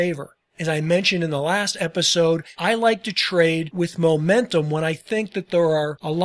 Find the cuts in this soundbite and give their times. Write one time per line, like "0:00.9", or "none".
none